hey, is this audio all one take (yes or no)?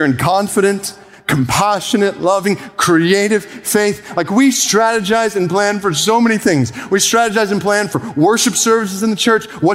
yes